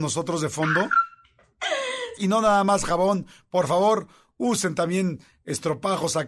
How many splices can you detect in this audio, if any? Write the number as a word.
one